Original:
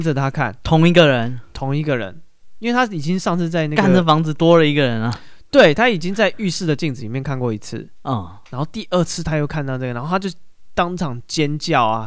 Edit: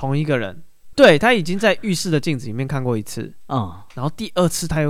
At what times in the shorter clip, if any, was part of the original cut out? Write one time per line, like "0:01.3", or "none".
0:00.9